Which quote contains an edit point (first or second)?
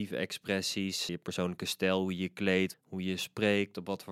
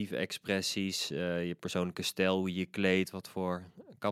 first